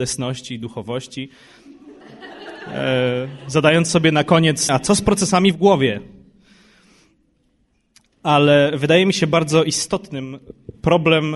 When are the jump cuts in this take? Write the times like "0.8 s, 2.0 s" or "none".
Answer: 4.7 s